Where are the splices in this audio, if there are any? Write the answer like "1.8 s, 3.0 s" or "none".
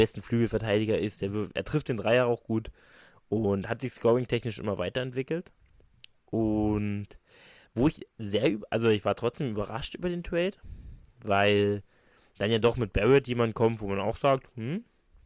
none